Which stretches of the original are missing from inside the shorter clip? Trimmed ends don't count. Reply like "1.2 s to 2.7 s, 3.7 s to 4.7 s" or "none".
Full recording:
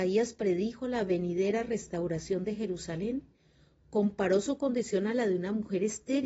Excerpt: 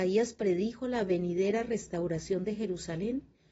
none